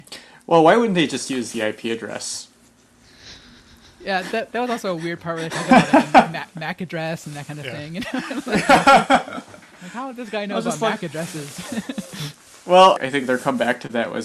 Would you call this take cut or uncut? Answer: uncut